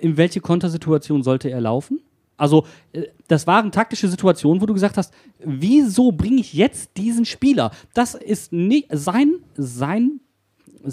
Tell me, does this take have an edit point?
no; 0 cuts

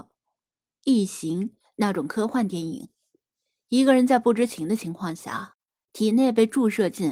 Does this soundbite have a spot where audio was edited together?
no; 0 cuts

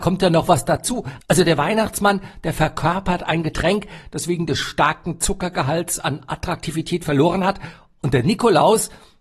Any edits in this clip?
yes; 1 cut; at 1.2 s

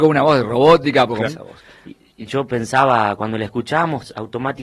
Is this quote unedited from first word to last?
no; 1 cut; at 1.2 s

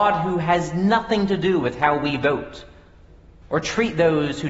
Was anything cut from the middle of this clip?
yes; 1 cut; at 3.4 s

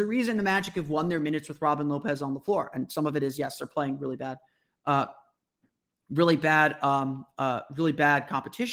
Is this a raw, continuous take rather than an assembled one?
yes; 0 cuts

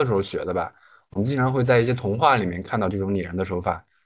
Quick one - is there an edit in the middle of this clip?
no; 0 cuts

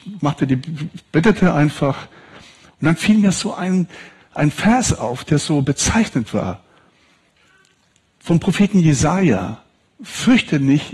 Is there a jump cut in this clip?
no; 0 cuts

